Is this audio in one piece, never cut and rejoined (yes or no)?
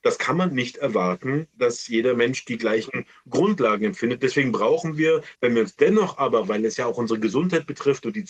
yes